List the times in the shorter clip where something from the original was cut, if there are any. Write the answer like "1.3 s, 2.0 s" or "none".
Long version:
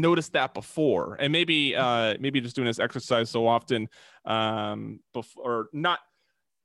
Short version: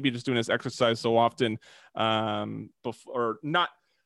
none